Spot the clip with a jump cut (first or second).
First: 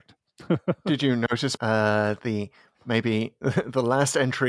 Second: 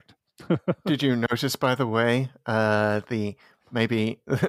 first